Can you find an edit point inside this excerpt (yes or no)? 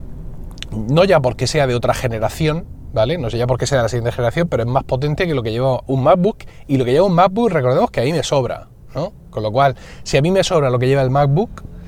no